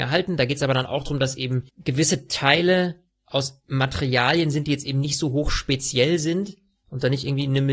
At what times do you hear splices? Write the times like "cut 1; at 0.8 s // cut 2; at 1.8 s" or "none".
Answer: cut 1; at 1.7 s